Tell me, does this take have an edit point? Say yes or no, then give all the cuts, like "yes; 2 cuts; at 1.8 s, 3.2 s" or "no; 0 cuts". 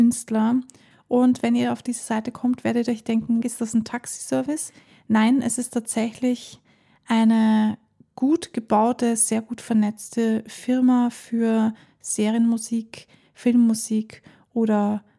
yes; 2 cuts; at 0.9 s, 3.4 s